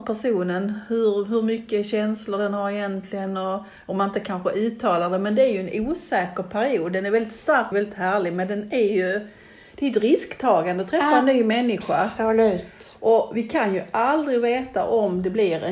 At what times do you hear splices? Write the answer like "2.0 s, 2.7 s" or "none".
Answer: 7.7 s